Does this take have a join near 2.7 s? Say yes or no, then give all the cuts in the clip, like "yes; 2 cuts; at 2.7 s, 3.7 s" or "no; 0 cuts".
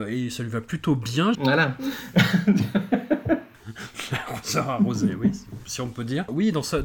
no; 1 cut; at 1.3 s